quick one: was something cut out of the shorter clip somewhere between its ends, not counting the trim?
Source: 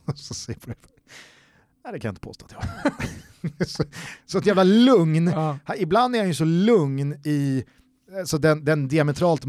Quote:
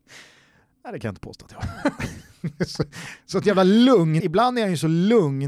yes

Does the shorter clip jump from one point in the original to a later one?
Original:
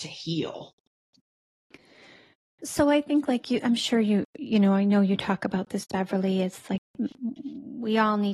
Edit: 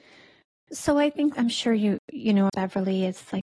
yes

